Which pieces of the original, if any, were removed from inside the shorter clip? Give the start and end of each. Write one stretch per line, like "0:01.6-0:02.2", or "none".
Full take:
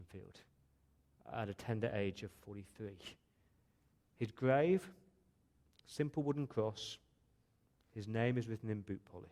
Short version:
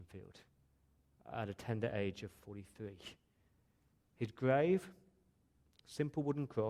none